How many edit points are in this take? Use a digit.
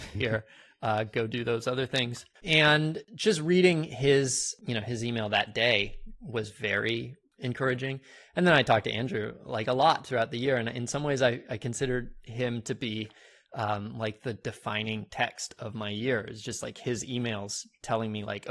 1